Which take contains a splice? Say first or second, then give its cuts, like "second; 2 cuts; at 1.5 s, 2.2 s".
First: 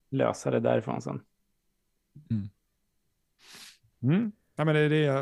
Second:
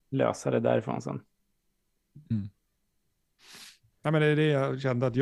second; 1 cut; at 4.0 s